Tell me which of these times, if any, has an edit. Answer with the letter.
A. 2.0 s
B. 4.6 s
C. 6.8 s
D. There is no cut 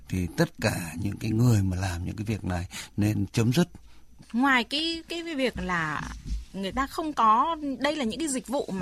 D